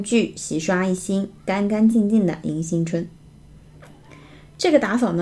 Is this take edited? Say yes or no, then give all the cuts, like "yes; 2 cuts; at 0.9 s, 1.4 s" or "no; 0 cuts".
no; 0 cuts